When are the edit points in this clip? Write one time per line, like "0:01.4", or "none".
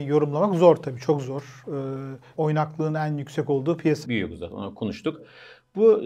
0:02.3
0:04.0